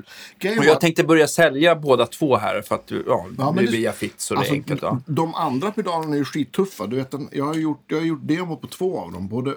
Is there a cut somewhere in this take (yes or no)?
no